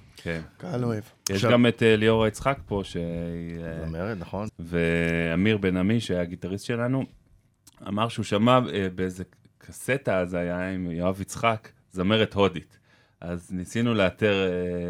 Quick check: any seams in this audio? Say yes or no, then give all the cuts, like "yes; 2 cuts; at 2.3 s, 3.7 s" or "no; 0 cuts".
yes; 1 cut; at 4.5 s